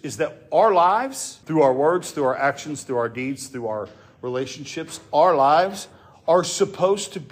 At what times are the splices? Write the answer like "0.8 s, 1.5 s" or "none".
1.4 s